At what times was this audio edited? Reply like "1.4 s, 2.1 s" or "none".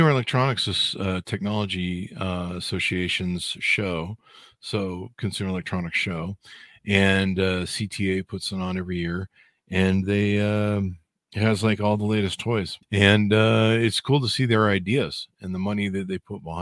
12.8 s